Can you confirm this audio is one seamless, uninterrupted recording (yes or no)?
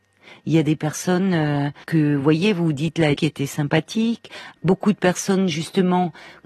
no